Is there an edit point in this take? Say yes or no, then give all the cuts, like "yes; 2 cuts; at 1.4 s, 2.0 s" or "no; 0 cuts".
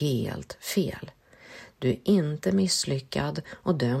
yes; 1 cut; at 1.7 s